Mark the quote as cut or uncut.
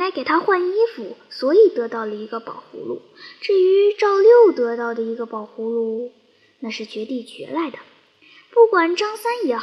uncut